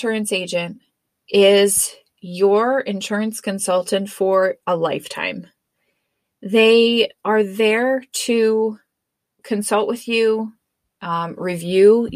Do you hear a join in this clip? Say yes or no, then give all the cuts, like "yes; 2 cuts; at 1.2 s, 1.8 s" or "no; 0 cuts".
no; 0 cuts